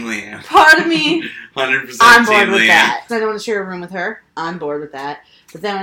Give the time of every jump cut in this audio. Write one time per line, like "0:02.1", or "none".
0:03.1